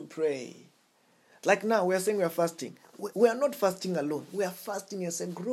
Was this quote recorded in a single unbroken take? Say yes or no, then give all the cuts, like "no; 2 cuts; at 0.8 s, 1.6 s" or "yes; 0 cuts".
yes; 0 cuts